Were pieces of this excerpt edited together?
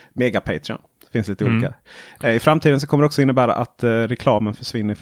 no; 0 cuts

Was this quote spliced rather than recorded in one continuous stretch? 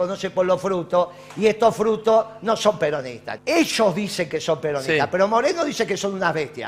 yes; 1 cut; at 3.4 s

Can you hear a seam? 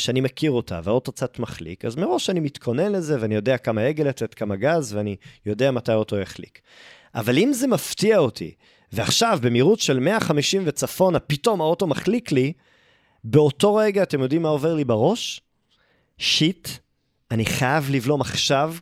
no; 0 cuts

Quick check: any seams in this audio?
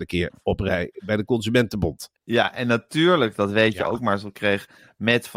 yes; 1 cut; at 2.2 s

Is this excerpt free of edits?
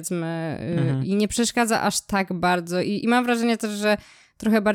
no; 1 cut; at 1.0 s

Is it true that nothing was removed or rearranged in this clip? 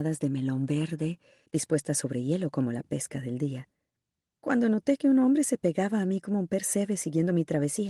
no; 1 cut; at 1.5 s

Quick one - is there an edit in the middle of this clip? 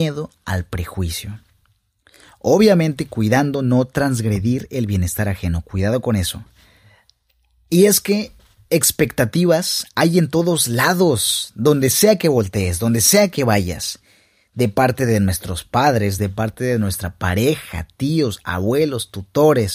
yes; 1 cut; at 16.2 s

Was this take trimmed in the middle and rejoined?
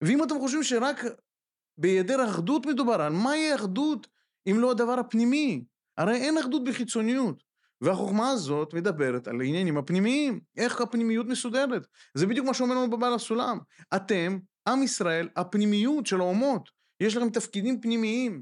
no; 0 cuts

